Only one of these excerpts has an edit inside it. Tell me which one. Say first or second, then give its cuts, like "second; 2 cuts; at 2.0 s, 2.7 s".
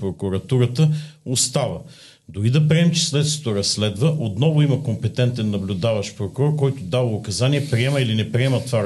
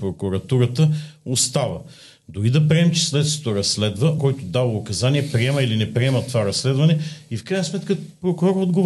second; 1 cut; at 4.2 s